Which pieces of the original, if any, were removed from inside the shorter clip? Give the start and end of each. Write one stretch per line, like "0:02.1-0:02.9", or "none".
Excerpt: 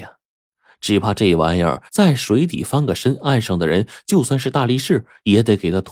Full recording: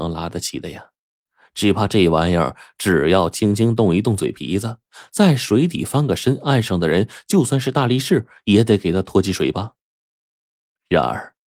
0:02.6-0:05.1